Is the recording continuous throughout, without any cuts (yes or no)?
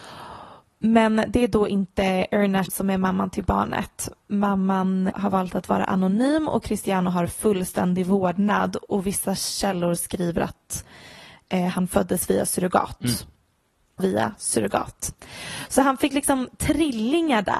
no